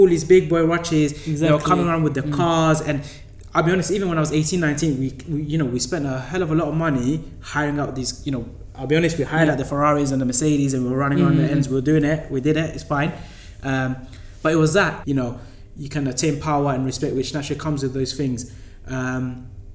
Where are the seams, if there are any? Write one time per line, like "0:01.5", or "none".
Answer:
0:15.0